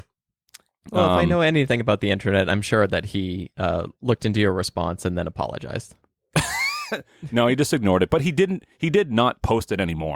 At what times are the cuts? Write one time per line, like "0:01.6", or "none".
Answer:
none